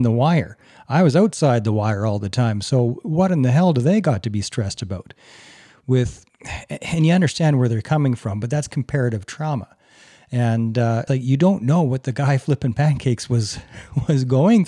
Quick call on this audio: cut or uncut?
cut